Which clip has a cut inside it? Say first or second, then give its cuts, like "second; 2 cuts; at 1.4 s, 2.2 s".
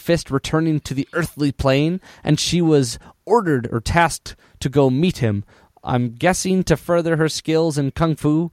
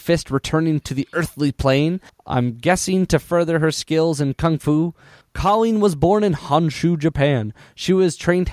second; 2 cuts; at 2.1 s, 5.2 s